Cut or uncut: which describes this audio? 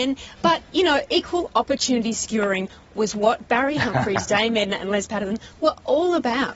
uncut